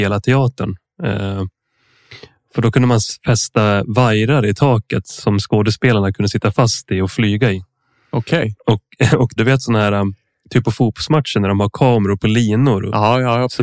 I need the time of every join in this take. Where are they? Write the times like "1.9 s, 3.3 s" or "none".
9.4 s